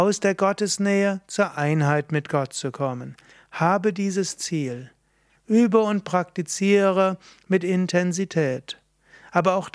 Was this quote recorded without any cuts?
no; 1 cut; at 5.3 s

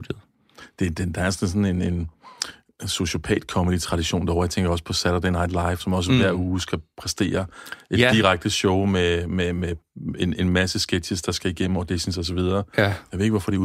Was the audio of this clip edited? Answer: yes; 1 cut; at 5.8 s

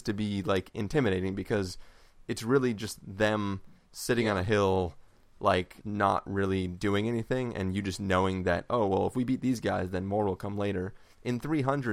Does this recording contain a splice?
yes; 1 cut; at 5.8 s

